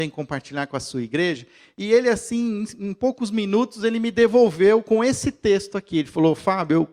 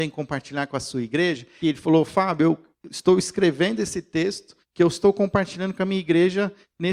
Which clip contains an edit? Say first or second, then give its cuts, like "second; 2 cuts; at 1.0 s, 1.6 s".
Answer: second; 2 cuts; at 1.6 s, 4.6 s